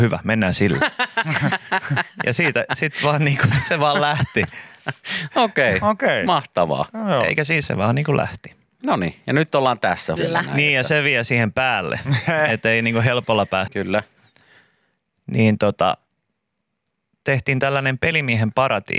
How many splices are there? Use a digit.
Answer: 3